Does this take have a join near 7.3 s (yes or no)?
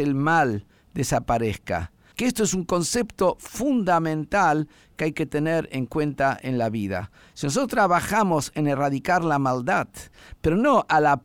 no